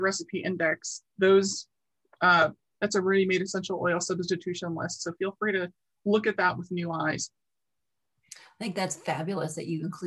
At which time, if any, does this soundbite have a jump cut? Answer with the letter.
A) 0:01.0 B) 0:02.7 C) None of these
B